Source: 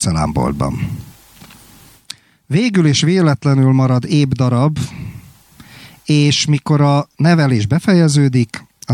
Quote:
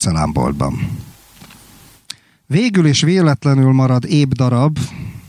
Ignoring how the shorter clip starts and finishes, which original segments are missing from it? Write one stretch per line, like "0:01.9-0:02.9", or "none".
none